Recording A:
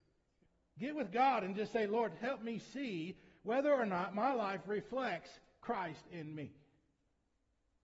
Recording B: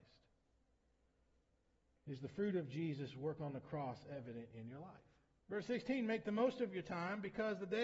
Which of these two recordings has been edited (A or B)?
B